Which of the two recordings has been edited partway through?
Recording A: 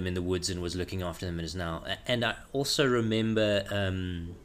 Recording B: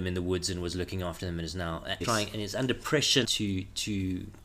B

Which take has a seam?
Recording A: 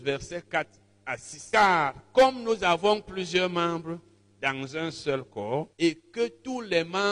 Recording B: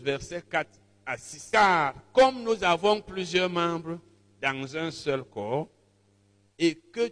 A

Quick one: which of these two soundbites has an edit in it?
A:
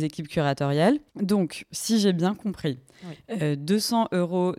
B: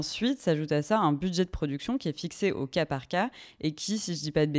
A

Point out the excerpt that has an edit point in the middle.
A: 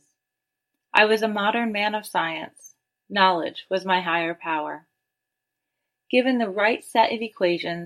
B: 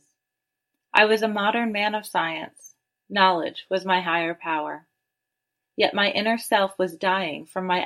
B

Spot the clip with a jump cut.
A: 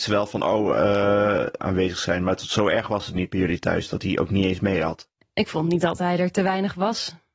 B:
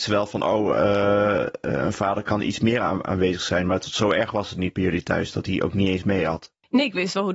A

